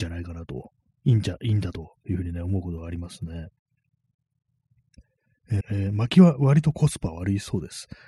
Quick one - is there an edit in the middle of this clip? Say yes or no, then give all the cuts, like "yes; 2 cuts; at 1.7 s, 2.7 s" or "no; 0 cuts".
yes; 1 cut; at 5.6 s